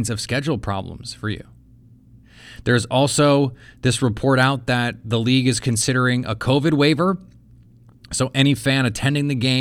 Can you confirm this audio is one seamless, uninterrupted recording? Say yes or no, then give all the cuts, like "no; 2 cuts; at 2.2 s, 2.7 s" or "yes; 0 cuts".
yes; 0 cuts